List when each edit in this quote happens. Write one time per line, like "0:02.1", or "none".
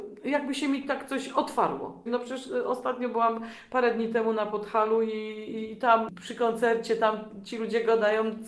0:02.1